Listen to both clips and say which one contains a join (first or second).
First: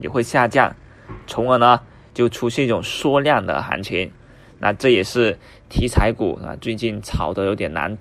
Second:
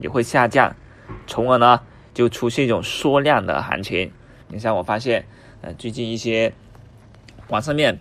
second